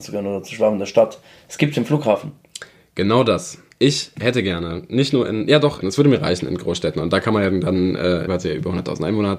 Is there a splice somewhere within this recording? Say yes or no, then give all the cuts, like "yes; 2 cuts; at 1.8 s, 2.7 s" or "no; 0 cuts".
yes; 2 cuts; at 5.8 s, 8.3 s